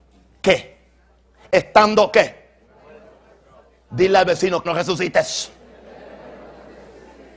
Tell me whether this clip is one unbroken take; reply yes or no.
no